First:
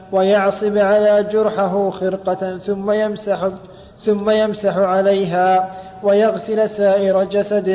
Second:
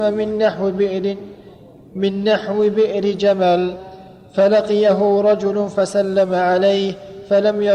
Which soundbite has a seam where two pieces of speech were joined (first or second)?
first